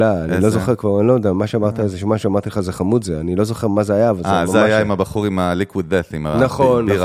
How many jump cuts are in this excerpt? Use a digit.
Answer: 0